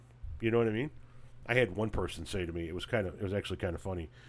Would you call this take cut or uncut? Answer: uncut